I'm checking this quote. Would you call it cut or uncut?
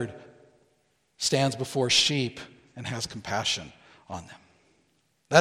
uncut